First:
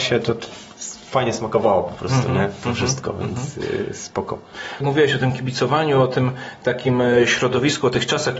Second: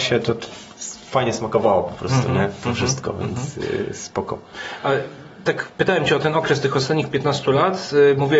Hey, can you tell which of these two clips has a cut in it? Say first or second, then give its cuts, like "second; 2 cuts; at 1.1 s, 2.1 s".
first; 1 cut; at 4.8 s